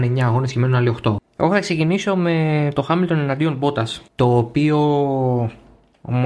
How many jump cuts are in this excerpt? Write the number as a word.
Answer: two